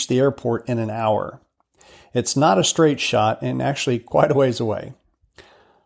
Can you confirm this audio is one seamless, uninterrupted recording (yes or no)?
yes